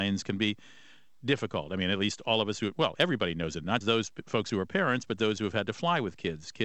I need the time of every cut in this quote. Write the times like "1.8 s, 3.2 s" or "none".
3.8 s